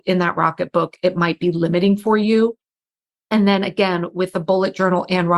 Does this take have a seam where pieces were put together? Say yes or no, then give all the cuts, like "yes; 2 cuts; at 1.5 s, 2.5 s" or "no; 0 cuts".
no; 0 cuts